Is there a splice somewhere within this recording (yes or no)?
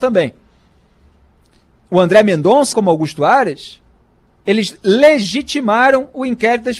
yes